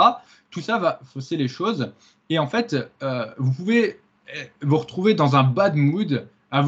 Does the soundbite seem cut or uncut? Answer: uncut